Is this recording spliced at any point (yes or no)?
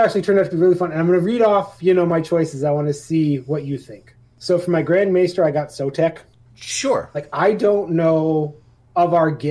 yes